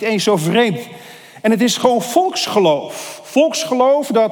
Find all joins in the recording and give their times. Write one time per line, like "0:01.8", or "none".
none